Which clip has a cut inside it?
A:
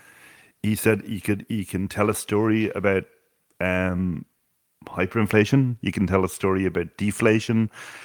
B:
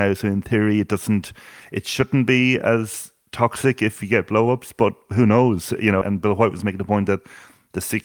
B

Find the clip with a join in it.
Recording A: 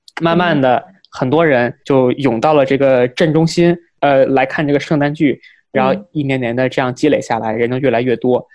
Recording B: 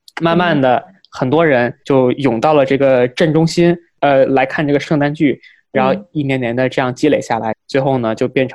B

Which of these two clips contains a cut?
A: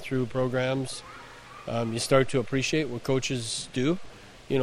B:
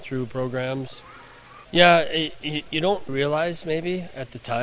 B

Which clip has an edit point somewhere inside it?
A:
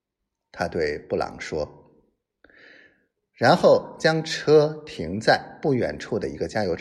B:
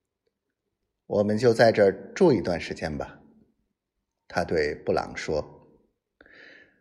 B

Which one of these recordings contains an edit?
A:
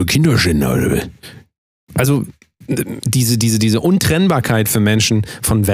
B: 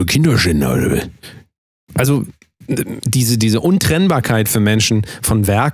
B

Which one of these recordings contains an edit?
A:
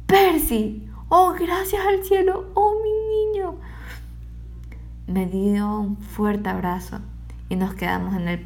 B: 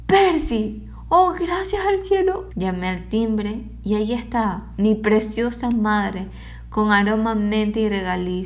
B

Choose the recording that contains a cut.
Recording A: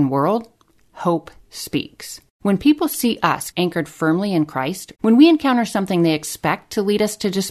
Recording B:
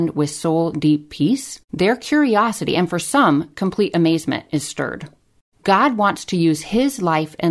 A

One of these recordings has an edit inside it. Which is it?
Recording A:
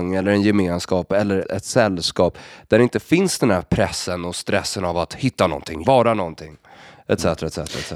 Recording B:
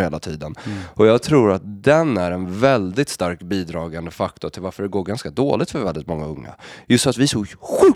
A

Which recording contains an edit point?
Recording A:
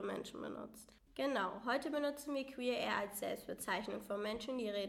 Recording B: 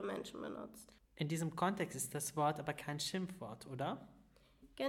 A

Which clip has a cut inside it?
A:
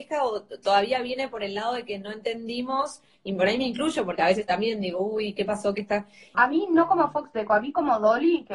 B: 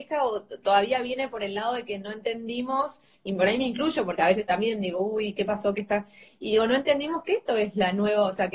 A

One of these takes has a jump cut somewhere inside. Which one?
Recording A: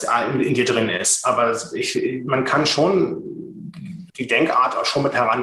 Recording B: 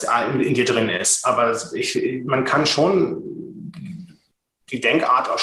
A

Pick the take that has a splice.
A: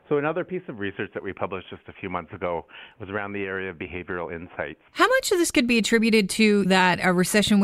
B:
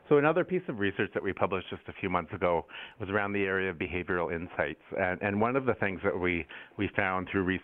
A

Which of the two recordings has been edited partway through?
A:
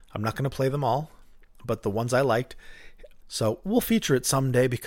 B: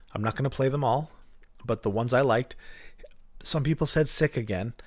A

